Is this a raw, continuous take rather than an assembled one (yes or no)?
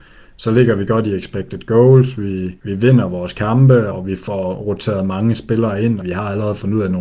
no